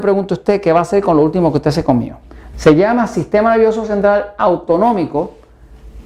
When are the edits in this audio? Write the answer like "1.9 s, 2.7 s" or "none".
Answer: 2.5 s